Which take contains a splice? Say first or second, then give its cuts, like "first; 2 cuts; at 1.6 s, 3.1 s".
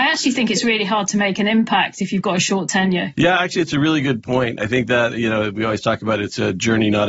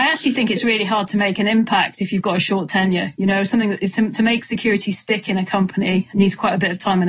first; 1 cut; at 3.1 s